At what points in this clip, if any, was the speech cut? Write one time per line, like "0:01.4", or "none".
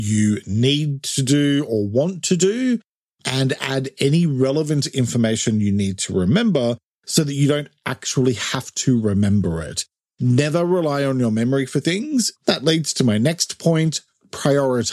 0:12.3